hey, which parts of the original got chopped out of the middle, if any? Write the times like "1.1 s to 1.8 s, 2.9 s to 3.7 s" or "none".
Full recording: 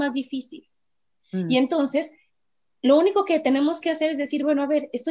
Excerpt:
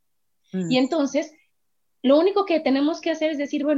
none

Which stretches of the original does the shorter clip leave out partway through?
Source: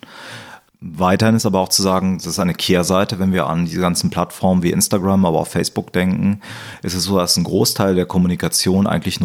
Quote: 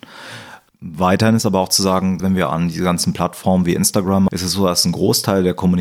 2.2 s to 3.2 s, 5.2 s to 6.8 s

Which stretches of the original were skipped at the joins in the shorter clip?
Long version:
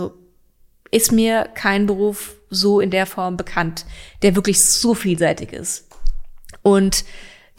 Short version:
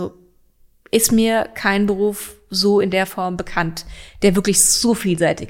none

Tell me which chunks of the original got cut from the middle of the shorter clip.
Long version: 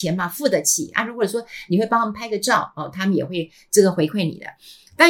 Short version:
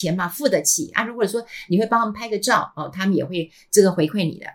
none

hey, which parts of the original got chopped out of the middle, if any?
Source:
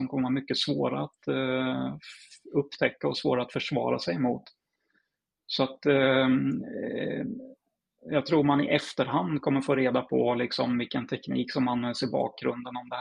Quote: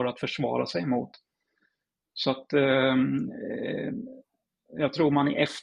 none

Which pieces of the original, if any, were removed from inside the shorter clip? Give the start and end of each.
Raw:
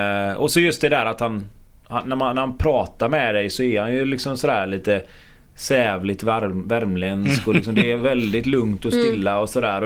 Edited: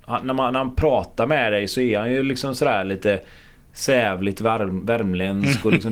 none

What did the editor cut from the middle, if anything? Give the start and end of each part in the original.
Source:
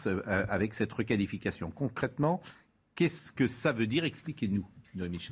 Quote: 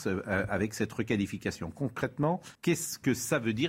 2.5 s to 2.9 s

